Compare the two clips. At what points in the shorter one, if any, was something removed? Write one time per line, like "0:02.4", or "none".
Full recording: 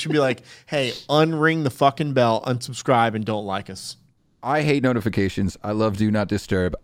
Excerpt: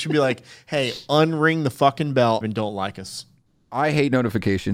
0:02.4